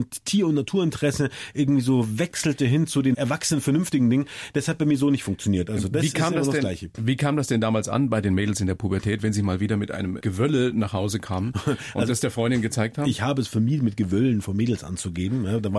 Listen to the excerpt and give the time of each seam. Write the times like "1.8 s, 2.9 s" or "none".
none